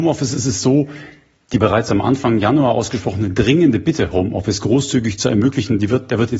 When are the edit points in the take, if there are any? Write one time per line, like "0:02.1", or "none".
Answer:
none